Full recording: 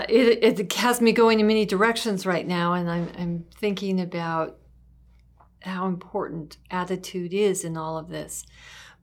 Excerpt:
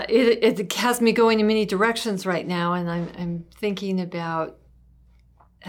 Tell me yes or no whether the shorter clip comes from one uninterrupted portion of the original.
yes